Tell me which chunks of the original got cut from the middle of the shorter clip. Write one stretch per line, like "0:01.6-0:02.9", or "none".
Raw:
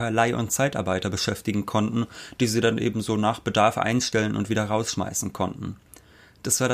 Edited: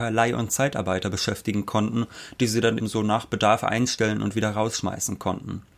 0:02.8-0:02.9